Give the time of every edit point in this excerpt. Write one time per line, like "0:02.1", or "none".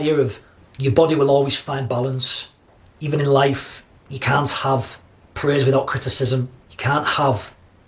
0:06.6